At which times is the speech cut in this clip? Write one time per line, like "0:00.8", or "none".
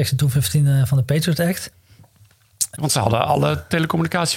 0:02.8